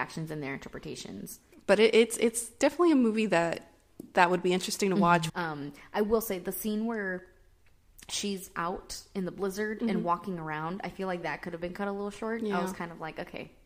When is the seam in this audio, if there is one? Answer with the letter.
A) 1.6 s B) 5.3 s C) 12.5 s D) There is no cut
B